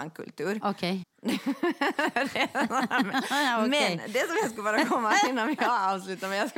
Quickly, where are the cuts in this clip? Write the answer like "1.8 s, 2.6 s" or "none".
1.0 s